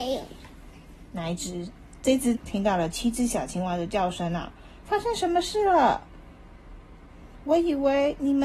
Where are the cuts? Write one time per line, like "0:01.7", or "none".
0:02.3
0:04.8